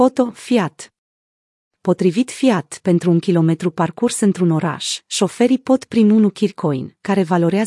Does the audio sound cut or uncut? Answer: uncut